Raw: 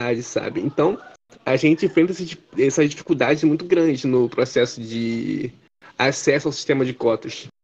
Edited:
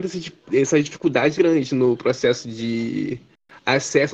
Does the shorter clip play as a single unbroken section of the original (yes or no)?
no